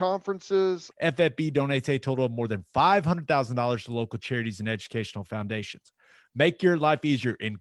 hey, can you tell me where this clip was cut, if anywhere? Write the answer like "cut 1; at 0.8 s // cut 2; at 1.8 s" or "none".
cut 1; at 0.9 s